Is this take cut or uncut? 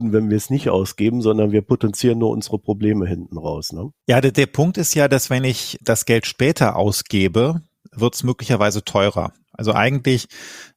uncut